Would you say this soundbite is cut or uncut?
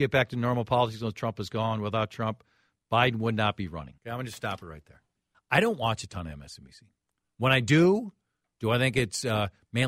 cut